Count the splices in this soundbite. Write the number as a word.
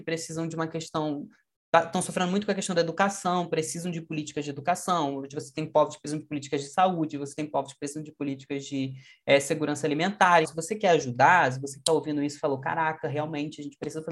one